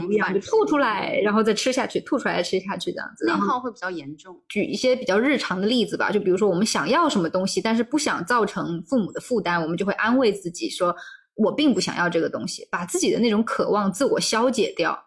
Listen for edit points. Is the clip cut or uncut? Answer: uncut